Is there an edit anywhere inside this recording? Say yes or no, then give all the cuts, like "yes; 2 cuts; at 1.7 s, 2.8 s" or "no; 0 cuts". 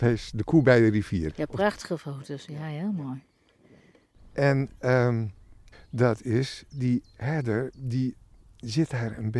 yes; 2 cuts; at 1.3 s, 5.7 s